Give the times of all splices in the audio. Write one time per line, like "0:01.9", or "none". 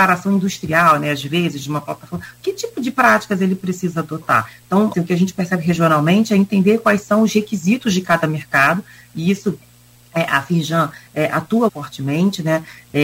0:04.9
0:11.7